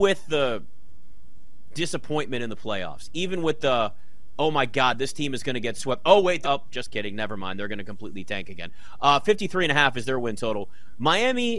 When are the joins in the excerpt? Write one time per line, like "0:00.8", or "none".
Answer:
0:06.4